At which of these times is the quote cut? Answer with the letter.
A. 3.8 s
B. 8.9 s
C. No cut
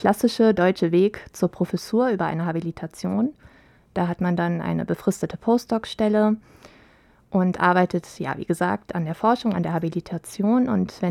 C